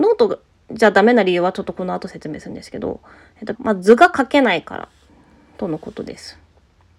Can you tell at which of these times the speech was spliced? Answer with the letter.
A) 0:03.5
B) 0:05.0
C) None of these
A